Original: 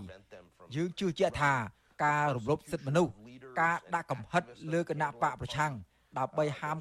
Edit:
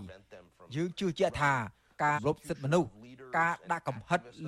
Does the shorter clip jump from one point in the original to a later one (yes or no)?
yes